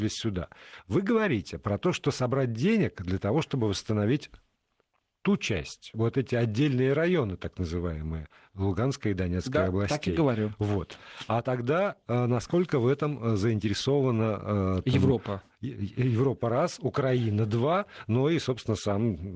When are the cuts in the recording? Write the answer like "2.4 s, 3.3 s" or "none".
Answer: 5.9 s